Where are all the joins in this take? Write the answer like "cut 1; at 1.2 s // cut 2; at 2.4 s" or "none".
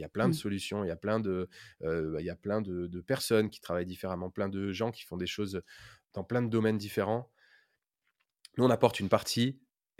cut 1; at 6.0 s